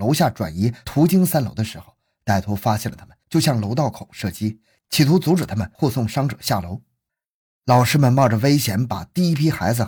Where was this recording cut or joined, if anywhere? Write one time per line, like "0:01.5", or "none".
none